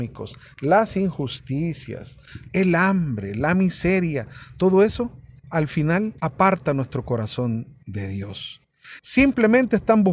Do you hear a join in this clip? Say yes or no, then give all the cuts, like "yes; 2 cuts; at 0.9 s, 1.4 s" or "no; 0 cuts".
yes; 3 cuts; at 2.5 s, 6.2 s, 9.0 s